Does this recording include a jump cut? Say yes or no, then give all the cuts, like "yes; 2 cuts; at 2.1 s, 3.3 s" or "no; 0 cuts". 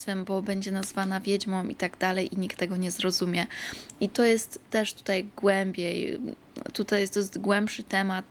no; 0 cuts